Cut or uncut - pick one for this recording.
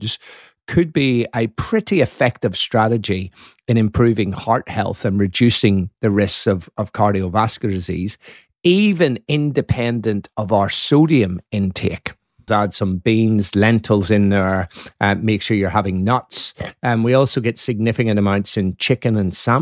cut